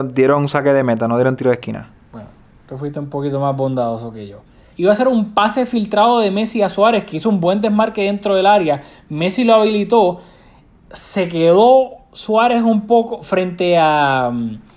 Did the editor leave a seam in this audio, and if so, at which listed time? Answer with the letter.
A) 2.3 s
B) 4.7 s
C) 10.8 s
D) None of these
B